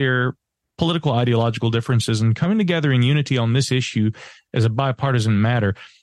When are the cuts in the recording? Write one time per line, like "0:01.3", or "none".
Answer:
none

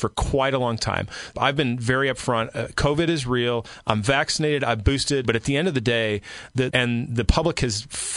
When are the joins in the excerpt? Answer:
0:01.3
0:05.2
0:06.7

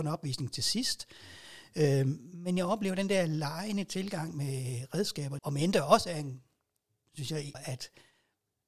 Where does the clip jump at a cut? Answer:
0:05.4
0:07.5

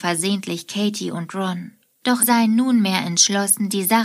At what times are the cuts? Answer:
0:02.2

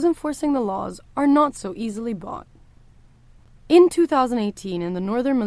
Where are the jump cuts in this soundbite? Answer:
none

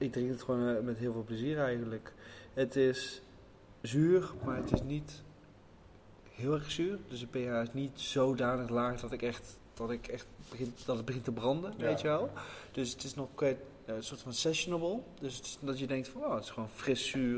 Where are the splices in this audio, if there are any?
none

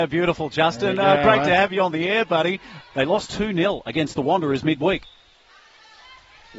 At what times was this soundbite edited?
0:02.8

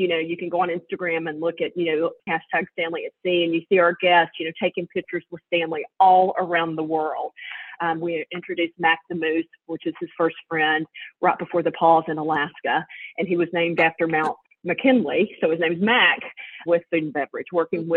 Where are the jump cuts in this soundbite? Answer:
0:07.8
0:16.7

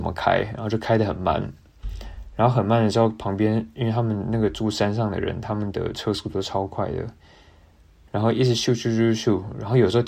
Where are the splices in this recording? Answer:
none

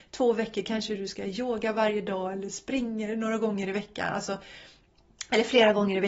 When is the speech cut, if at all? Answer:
none

